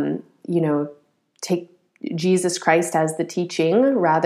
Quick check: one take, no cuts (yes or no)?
yes